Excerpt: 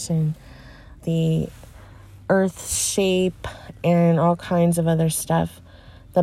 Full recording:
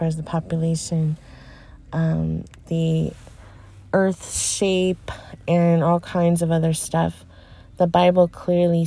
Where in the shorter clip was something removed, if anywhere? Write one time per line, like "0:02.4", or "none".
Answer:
0:01.0